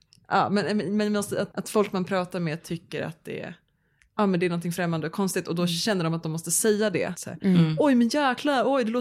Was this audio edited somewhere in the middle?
yes; 2 cuts; at 1.5 s, 7.1 s

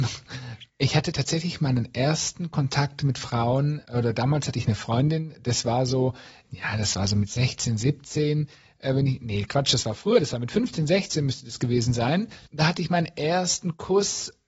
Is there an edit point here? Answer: no; 0 cuts

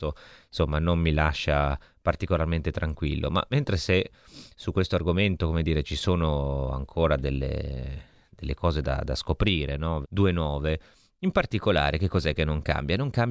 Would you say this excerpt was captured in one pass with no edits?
no; 1 cut; at 10.0 s

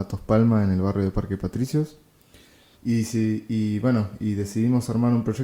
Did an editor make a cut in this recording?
yes; 1 cut; at 2.7 s

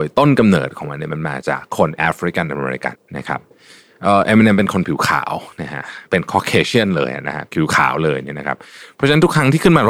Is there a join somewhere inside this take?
yes; 1 cut; at 2.9 s

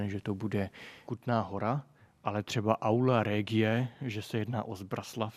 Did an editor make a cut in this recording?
no; 0 cuts

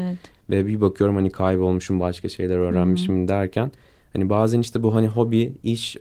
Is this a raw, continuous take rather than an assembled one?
yes; 0 cuts

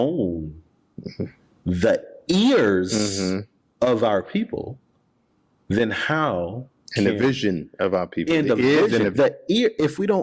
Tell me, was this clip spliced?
yes; 1 cut; at 9.1 s

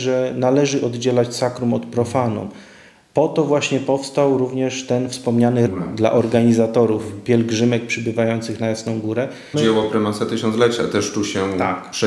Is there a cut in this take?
yes; 2 cuts; at 5.7 s, 9.5 s

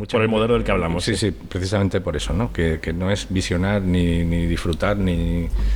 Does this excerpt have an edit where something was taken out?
no; 0 cuts

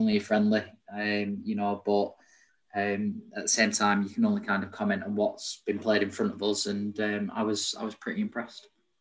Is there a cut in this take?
no; 0 cuts

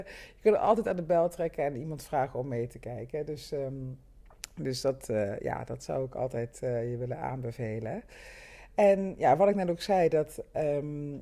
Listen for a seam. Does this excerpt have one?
no; 0 cuts

